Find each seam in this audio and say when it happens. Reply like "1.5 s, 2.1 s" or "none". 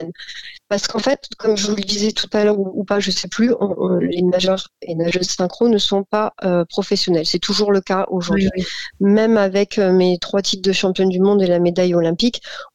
none